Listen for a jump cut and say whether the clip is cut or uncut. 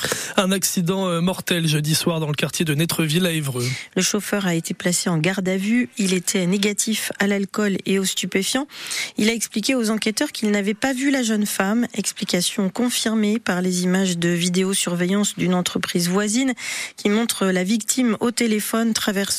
cut